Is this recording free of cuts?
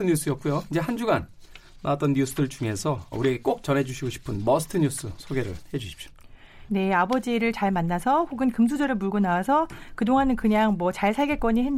no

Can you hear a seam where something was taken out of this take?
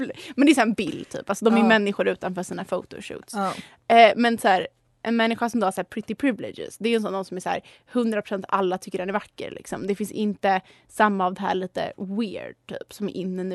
no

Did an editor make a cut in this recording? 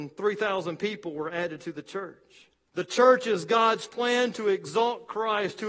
yes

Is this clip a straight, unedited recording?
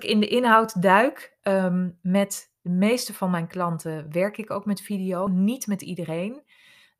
yes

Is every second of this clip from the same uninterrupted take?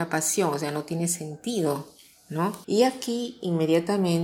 no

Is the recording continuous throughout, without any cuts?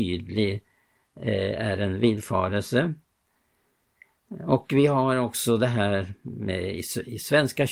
yes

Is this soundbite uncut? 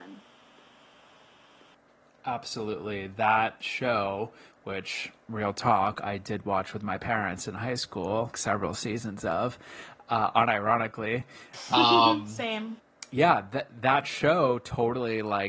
no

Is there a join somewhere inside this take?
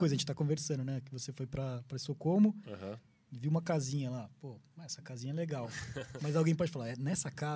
no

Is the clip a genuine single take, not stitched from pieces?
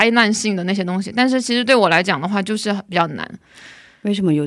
yes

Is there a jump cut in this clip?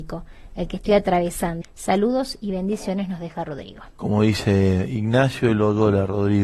yes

